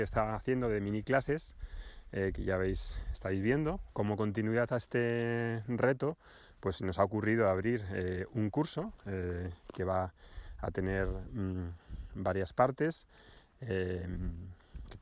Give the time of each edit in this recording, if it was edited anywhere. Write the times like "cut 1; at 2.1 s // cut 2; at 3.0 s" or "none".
cut 1; at 3.9 s